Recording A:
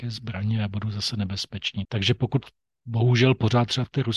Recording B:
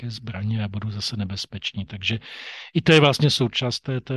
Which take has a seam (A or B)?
A